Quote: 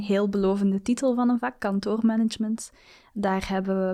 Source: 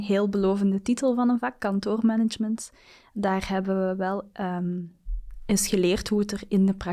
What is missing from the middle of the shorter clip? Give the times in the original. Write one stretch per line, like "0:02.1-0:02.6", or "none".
none